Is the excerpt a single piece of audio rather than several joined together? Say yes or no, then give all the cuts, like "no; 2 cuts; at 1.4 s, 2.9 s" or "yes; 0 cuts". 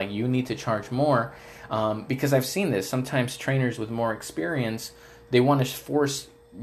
yes; 0 cuts